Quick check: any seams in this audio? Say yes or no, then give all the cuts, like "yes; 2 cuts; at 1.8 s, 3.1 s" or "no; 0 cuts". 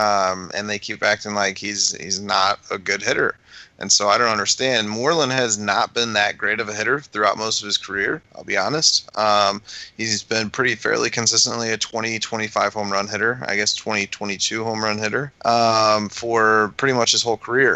no; 0 cuts